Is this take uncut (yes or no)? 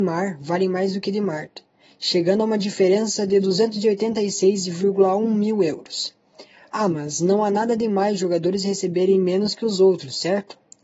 yes